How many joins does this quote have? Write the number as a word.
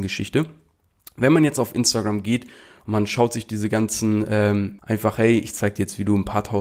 one